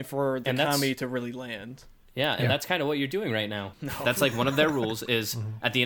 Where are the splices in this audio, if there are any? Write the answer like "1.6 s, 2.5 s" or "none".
3.7 s